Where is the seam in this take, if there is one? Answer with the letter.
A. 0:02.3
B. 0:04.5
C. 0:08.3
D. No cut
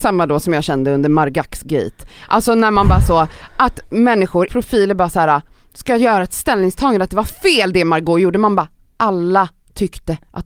B